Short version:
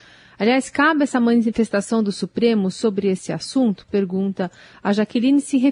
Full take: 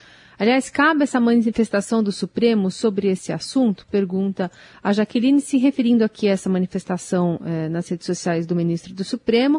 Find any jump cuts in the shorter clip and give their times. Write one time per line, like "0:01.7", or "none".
none